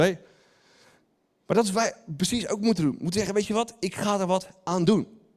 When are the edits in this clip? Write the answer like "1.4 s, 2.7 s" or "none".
none